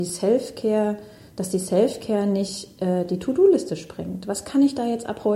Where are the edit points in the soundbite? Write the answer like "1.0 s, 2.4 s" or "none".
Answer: none